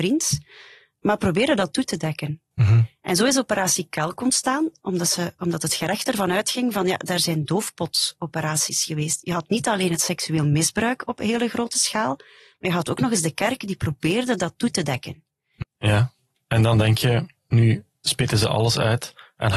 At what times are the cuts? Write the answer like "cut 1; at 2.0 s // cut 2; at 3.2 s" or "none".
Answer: cut 1; at 15.6 s // cut 2; at 17.4 s